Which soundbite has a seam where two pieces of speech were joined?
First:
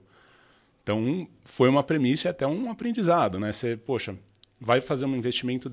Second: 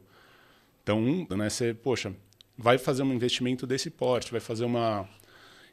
second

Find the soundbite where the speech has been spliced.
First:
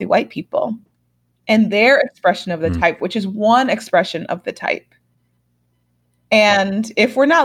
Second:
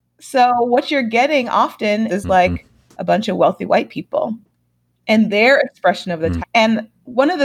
second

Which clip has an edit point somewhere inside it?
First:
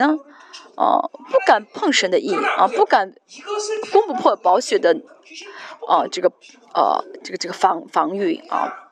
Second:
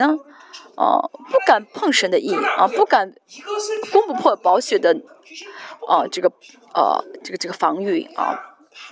second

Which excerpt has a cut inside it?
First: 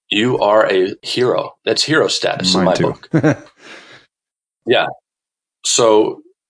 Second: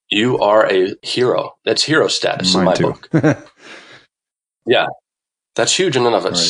second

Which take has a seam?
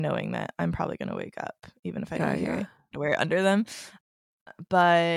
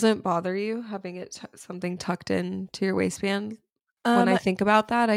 first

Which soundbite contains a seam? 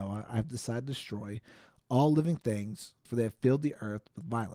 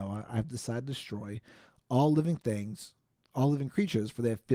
first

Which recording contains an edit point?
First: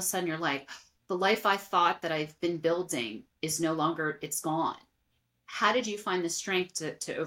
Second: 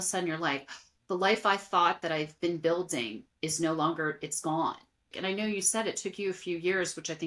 second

